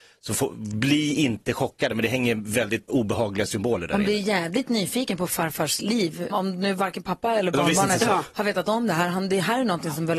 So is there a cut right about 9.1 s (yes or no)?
no